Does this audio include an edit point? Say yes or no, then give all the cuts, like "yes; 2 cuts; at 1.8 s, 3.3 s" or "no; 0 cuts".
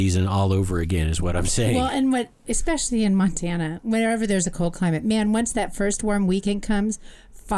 no; 0 cuts